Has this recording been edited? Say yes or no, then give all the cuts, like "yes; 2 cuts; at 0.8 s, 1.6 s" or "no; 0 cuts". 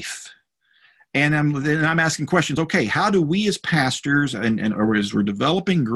no; 0 cuts